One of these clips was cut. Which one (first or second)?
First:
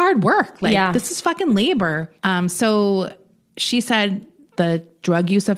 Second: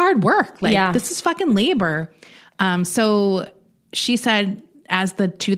first